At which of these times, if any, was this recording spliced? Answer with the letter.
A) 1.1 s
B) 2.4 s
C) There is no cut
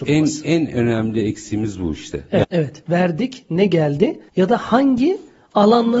B